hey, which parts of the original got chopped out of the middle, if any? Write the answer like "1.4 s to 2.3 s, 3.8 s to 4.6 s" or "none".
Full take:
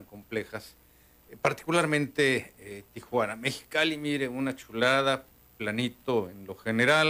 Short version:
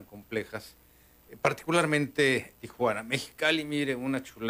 2.5 s to 2.9 s